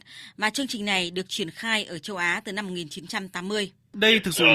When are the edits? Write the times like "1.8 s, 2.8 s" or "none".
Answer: none